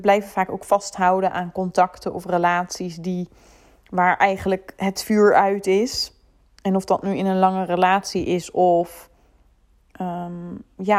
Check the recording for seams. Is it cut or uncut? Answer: uncut